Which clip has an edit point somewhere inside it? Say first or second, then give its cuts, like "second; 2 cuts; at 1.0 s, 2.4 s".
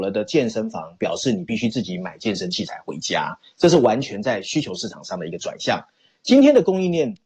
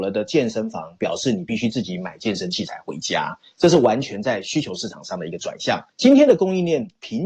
second; 1 cut; at 5.9 s